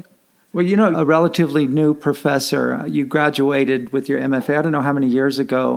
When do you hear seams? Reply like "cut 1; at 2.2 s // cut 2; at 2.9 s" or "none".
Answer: cut 1; at 0.9 s